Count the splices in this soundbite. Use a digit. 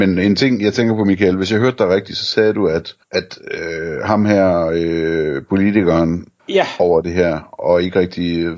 2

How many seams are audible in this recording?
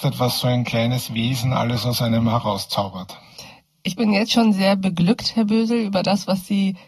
0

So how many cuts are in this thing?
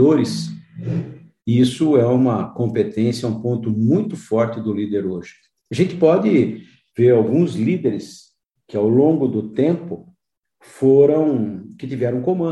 1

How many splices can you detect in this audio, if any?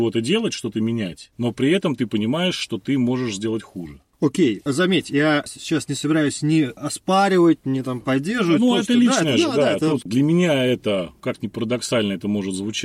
1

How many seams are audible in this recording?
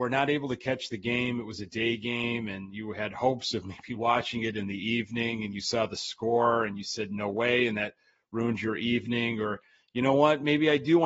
0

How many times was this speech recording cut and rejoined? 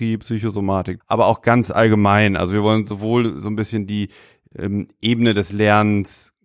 1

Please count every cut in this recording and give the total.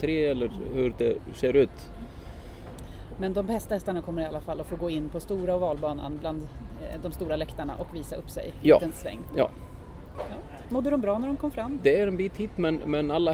2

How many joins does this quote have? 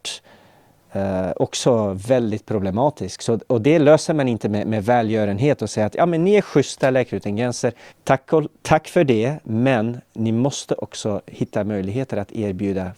1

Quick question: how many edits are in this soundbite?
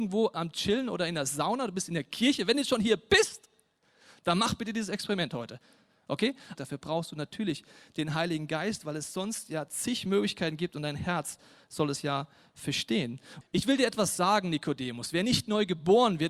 2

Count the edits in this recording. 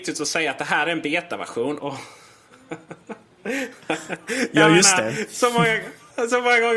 1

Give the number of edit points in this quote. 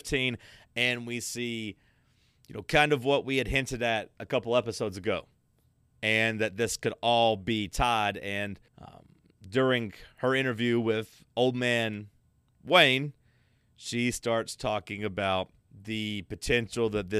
2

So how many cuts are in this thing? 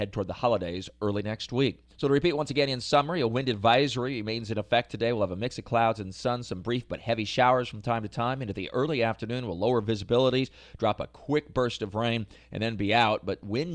1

